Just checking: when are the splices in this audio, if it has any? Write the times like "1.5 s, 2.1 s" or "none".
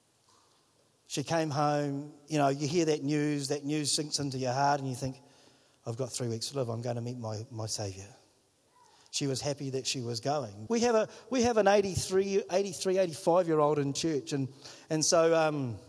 10.7 s